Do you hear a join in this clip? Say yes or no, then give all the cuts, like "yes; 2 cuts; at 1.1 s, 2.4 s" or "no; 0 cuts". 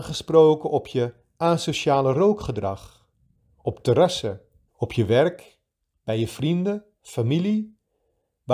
yes; 1 cut; at 4.7 s